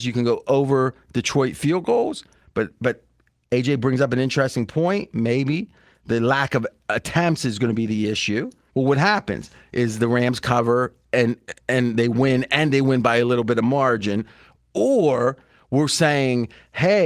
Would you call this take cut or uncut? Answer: cut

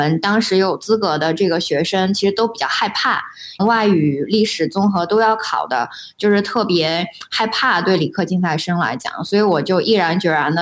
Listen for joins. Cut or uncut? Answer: cut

